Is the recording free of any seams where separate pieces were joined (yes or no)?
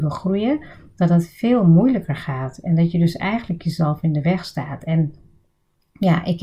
yes